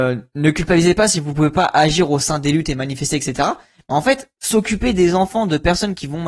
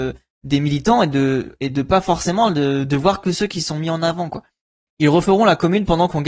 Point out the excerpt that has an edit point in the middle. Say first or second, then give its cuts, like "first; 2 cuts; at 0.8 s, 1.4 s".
second; 1 cut; at 4.9 s